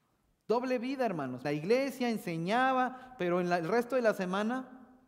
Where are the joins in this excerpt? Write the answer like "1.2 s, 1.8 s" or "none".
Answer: 1.4 s